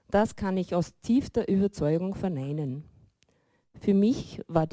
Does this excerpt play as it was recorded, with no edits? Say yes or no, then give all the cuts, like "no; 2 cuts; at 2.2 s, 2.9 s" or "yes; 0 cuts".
yes; 0 cuts